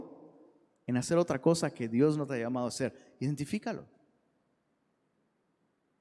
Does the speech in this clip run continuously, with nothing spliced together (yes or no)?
yes